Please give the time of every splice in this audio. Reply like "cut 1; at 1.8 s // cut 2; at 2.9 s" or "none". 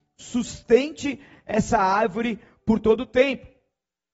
none